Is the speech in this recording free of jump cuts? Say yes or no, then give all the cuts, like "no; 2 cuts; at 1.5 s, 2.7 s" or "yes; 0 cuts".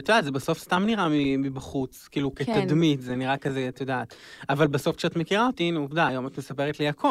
yes; 0 cuts